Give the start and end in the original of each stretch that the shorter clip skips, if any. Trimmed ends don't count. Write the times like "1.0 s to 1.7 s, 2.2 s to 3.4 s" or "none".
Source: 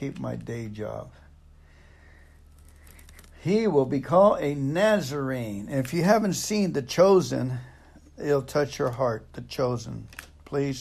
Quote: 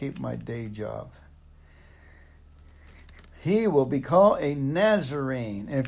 none